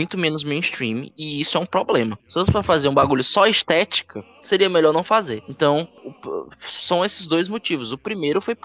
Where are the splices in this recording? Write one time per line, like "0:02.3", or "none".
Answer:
0:02.2